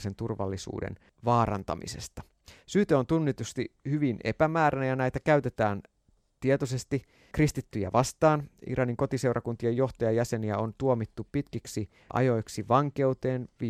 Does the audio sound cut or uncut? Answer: uncut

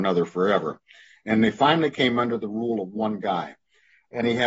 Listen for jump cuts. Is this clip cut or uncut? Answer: uncut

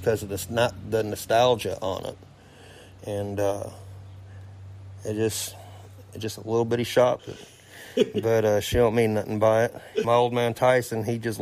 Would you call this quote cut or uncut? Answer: cut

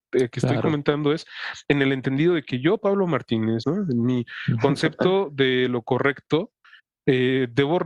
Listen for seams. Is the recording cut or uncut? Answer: cut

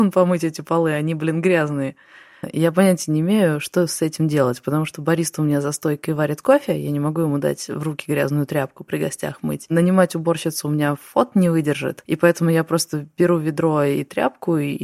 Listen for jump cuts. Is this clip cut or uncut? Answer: cut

